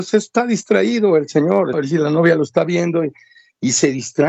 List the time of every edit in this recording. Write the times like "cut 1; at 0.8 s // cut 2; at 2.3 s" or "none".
cut 1; at 1.7 s